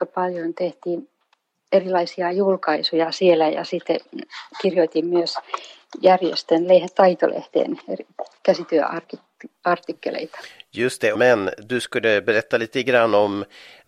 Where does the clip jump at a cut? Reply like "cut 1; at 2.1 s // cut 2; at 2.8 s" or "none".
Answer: cut 1; at 11.1 s